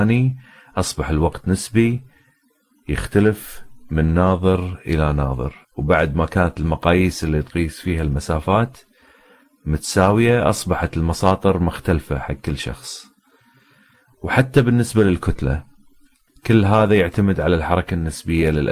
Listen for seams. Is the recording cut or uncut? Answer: cut